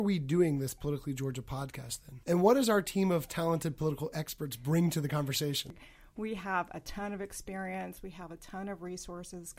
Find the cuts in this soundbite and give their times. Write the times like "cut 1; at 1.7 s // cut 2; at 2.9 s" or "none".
cut 1; at 2.2 s